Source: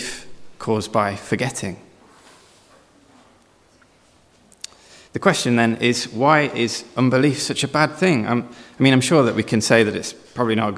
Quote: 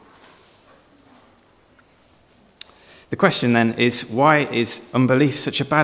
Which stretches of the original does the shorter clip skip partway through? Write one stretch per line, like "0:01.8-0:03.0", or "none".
none